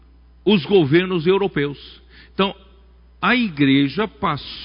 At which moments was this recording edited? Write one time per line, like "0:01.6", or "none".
none